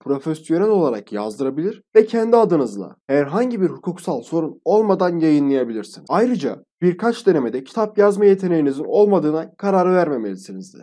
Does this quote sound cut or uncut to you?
cut